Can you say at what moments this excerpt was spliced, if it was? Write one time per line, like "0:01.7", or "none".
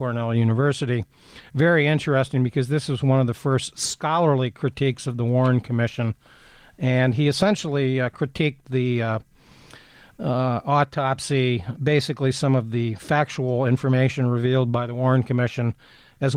0:11.7